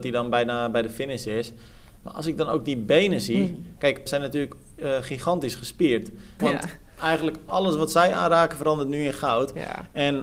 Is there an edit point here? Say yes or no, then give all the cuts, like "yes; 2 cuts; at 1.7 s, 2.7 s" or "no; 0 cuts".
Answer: yes; 2 cuts; at 4.1 s, 6.4 s